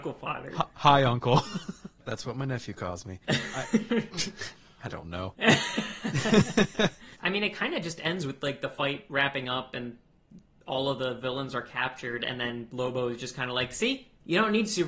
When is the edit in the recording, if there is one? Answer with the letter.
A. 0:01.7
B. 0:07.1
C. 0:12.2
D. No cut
B